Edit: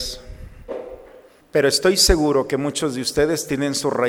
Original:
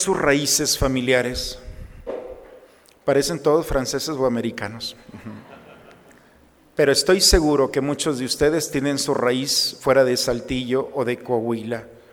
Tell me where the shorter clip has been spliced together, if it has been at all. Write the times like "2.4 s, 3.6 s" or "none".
1.4 s